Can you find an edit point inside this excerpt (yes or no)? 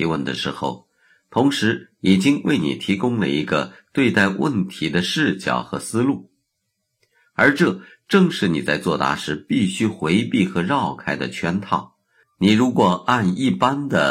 yes